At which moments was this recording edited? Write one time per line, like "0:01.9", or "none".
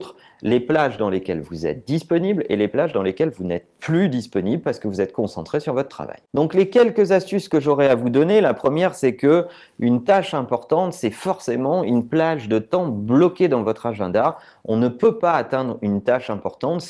none